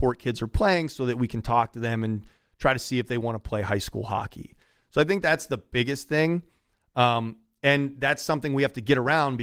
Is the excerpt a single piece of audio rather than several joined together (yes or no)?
yes